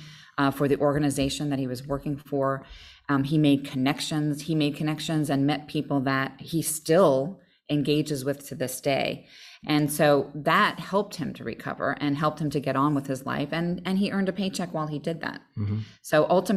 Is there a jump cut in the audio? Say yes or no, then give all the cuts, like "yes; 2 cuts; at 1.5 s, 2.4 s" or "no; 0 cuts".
no; 0 cuts